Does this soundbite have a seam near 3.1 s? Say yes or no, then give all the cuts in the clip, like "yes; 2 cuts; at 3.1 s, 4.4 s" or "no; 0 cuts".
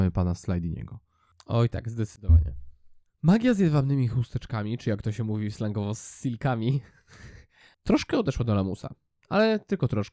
yes; 1 cut; at 3.1 s